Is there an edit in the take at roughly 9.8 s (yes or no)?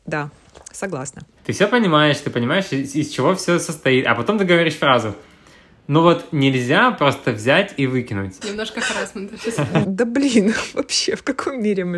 yes